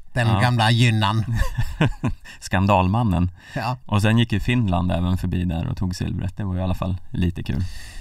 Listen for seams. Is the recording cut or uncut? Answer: cut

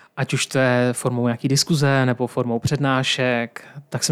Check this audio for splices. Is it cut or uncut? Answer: uncut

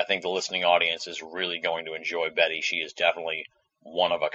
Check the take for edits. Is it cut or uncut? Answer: uncut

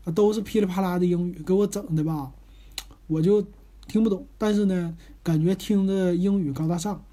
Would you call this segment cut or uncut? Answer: uncut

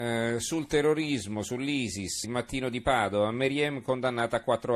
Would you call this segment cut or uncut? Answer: cut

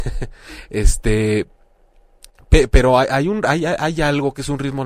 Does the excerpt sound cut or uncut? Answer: uncut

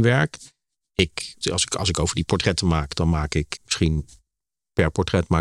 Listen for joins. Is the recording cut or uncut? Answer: cut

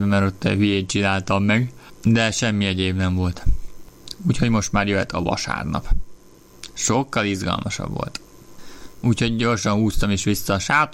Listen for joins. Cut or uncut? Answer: cut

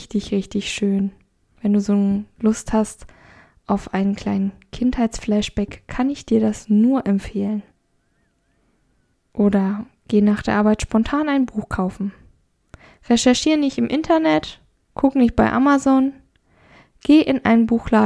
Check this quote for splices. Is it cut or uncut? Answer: uncut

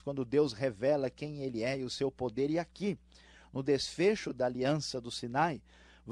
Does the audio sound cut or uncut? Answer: uncut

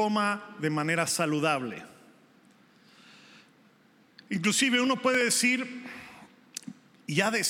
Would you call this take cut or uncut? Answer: uncut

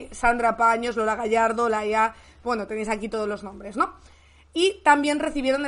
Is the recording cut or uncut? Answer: uncut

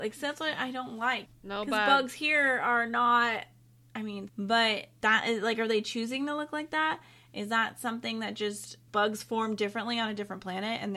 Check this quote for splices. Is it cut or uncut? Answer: cut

